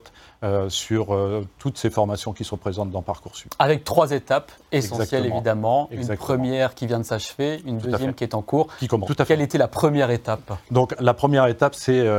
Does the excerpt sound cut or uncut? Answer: cut